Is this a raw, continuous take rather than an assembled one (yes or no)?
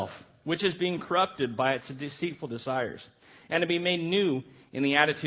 yes